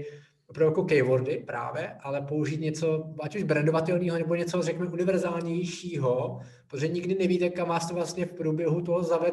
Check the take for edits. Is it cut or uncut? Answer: uncut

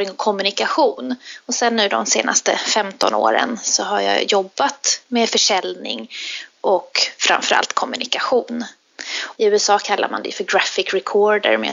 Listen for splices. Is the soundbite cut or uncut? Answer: cut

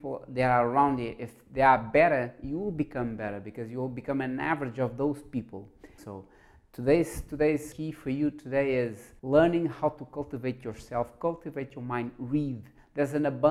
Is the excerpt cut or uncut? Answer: cut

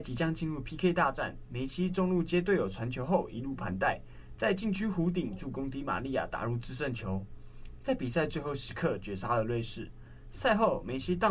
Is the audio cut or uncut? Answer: uncut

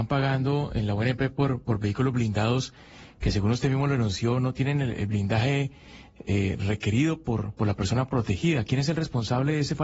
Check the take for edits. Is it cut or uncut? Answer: uncut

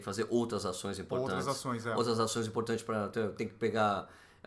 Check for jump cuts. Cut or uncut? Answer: uncut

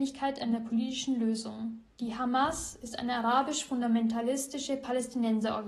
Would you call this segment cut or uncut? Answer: cut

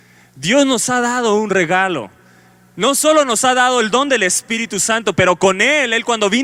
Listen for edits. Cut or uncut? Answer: uncut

